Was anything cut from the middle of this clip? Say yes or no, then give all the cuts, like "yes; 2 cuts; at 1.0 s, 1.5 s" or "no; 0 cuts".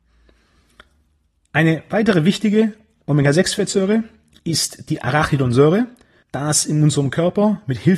yes; 1 cut; at 6.2 s